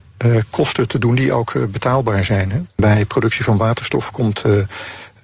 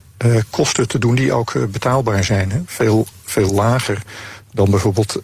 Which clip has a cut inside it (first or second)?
first